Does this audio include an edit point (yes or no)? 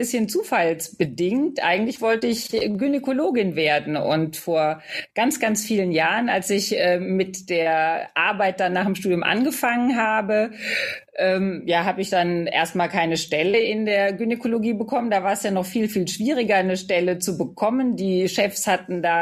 no